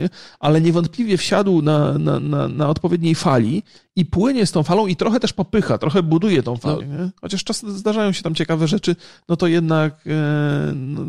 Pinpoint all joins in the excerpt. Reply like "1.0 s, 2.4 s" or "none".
6.8 s